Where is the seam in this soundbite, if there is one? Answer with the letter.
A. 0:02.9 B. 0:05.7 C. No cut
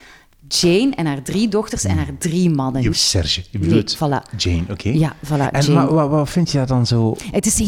A